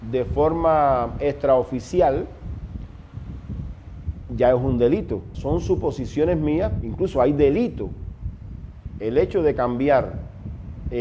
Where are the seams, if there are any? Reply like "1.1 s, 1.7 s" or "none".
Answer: 5.3 s, 6.8 s